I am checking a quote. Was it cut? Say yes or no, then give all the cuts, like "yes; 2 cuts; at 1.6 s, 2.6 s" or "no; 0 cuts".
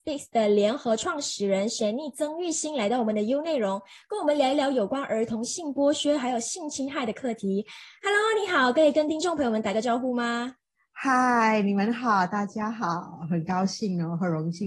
no; 0 cuts